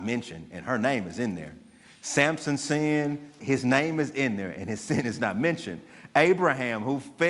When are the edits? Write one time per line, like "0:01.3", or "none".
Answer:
0:03.4

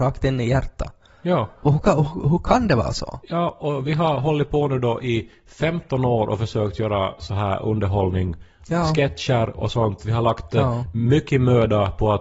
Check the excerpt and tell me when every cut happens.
none

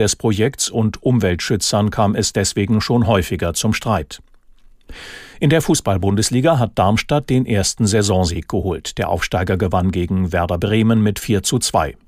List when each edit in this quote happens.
none

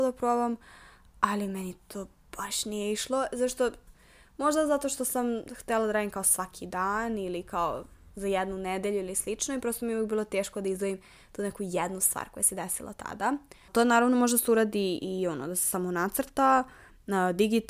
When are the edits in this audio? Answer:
0:13.7

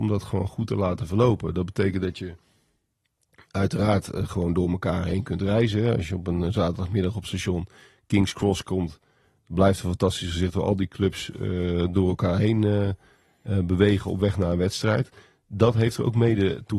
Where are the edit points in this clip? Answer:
none

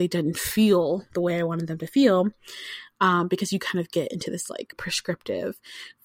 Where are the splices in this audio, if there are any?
0:04.7

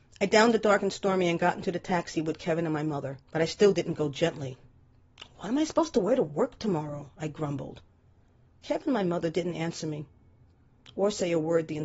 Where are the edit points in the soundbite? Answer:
0:03.2

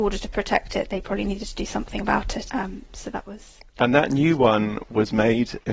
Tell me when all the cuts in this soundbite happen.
0:02.5

